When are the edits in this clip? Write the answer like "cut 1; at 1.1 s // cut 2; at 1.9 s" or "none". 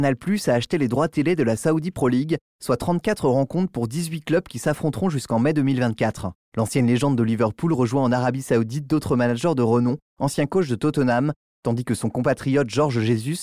cut 1; at 6.4 s // cut 2; at 10.0 s // cut 3; at 11.5 s